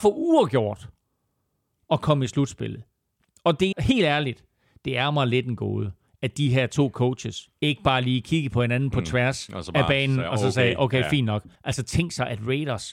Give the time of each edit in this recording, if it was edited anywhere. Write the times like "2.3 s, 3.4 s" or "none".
3.7 s, 11.5 s